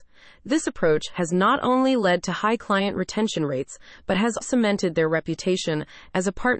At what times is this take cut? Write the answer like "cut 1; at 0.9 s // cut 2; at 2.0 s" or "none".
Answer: cut 1; at 4.4 s